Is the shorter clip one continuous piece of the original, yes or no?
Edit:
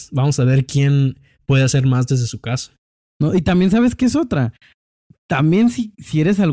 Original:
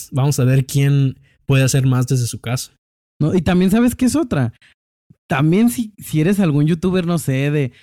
yes